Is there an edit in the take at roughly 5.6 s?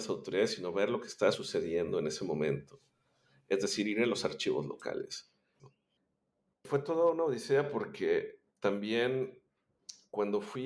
yes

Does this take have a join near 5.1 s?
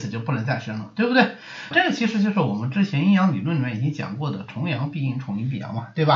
no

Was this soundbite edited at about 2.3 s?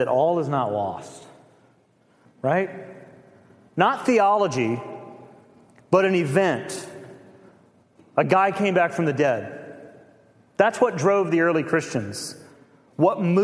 yes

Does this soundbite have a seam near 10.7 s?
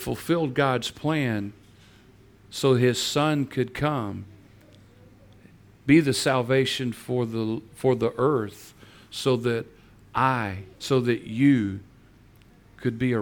yes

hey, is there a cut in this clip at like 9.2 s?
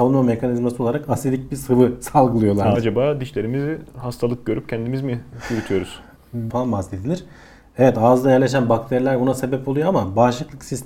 no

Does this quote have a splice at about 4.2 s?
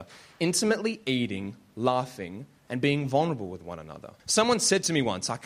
yes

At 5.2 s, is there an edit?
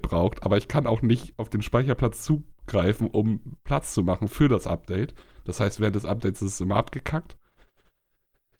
no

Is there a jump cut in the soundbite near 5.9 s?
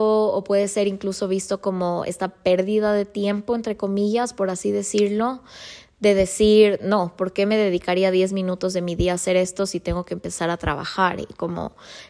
no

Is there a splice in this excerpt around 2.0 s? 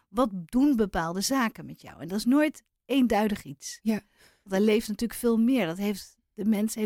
no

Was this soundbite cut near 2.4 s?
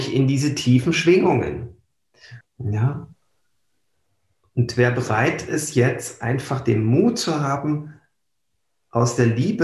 yes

